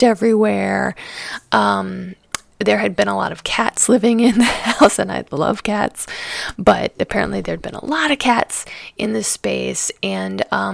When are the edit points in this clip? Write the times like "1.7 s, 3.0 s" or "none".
6.6 s